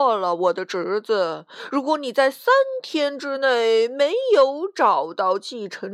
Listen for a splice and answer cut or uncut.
uncut